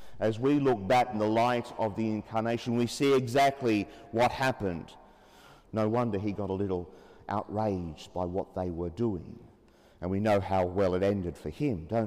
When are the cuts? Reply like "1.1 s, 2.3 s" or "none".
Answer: 1.1 s, 5.6 s